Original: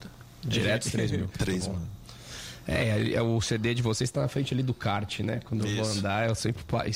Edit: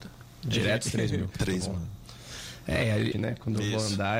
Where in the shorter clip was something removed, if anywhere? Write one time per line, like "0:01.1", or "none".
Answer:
0:03.1